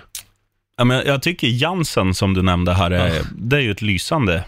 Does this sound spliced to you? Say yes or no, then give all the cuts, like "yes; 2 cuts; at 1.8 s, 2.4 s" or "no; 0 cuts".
no; 0 cuts